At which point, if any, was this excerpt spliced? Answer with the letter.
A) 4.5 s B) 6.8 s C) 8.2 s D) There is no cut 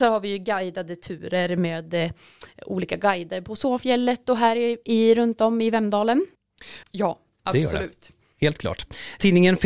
B